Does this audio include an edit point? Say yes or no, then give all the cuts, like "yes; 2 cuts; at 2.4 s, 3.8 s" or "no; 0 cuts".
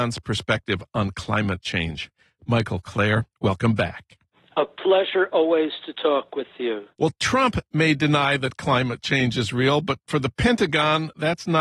no; 0 cuts